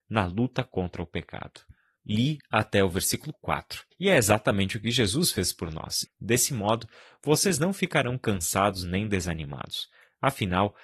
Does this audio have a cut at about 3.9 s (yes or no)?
yes